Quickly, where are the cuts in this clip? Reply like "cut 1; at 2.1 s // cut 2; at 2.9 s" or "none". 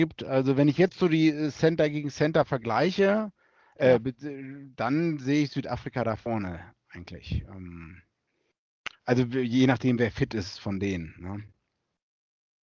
none